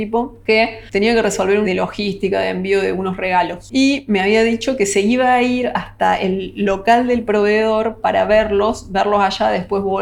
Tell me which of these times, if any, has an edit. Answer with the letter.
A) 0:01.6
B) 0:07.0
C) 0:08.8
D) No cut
A